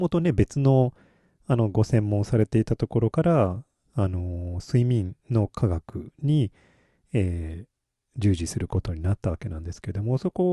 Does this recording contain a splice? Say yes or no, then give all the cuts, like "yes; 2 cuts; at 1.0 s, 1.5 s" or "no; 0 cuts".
no; 0 cuts